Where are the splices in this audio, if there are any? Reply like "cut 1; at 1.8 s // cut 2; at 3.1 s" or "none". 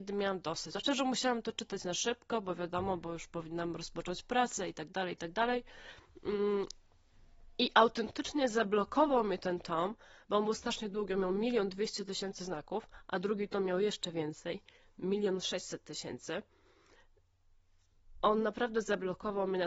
none